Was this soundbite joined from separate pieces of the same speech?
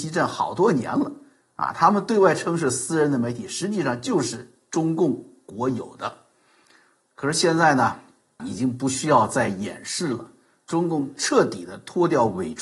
yes; 1 cut; at 8.4 s

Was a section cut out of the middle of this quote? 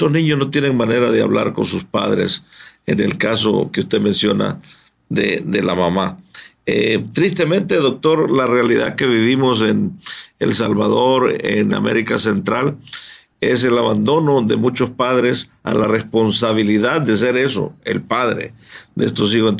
no; 0 cuts

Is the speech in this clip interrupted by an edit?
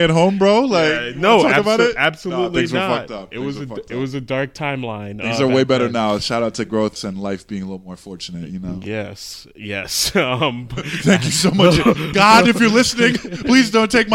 yes; 1 cut; at 7.0 s

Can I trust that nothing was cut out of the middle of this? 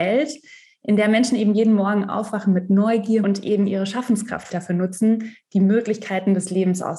no; 2 cuts; at 3.2 s, 4.5 s

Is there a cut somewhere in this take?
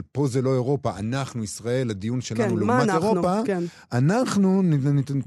no; 0 cuts

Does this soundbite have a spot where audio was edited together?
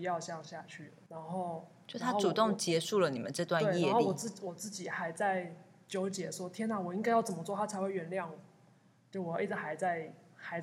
no; 0 cuts

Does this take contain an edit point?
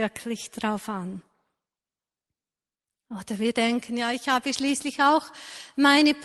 no; 0 cuts

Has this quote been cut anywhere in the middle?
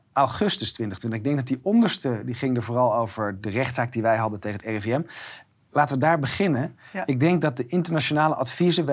no; 0 cuts

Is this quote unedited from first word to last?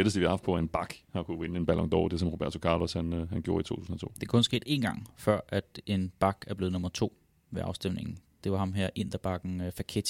yes; 0 cuts

